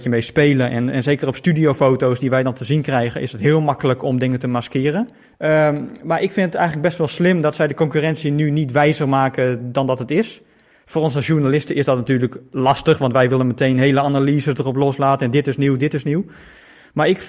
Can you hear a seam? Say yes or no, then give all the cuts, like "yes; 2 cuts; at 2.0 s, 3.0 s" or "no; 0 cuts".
yes; 1 cut; at 5.3 s